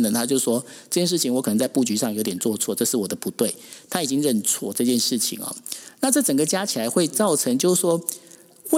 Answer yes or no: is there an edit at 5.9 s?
no